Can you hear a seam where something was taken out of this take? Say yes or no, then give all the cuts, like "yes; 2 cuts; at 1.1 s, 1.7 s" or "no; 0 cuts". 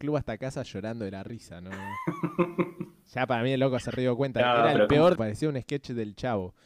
yes; 1 cut; at 5.2 s